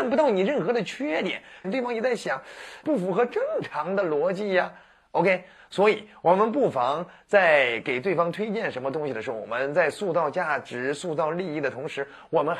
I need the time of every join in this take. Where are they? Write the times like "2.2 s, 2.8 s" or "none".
1.6 s, 2.8 s

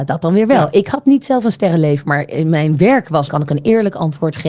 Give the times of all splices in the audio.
3.3 s

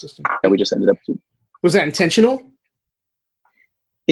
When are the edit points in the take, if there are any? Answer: none

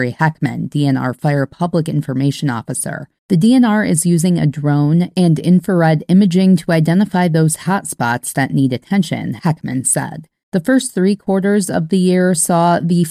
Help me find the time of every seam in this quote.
3.2 s, 10.4 s

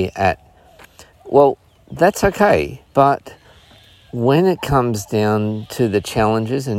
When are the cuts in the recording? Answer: 1.1 s, 2.8 s

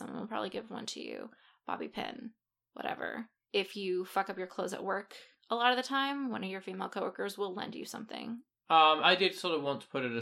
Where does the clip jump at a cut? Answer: 8.6 s

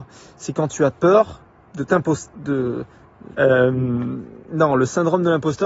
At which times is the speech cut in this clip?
3.3 s

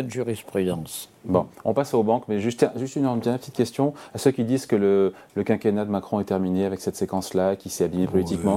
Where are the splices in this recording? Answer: none

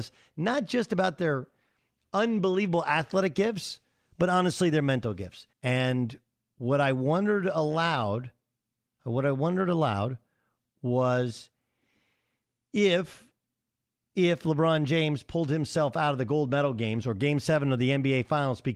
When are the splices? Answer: 5.5 s

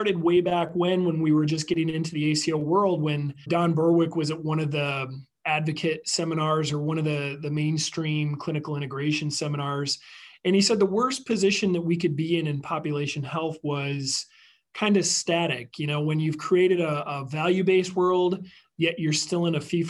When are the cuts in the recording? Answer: none

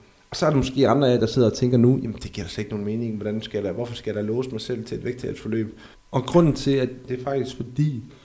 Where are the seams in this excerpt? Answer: 5.9 s, 7.1 s

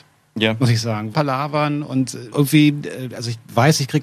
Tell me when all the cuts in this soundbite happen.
1.1 s, 2.3 s

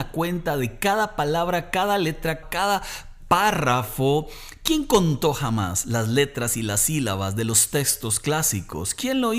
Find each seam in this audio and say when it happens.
2.4 s

